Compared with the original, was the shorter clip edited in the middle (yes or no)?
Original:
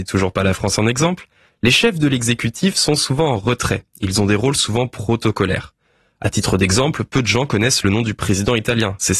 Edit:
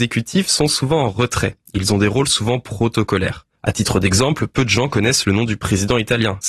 yes